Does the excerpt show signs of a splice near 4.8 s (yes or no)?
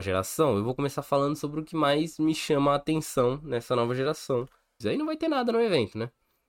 yes